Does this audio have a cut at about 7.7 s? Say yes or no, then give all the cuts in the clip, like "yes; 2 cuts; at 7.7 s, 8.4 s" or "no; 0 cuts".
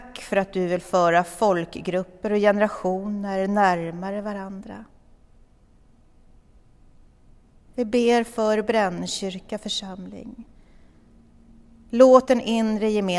yes; 1 cut; at 7.7 s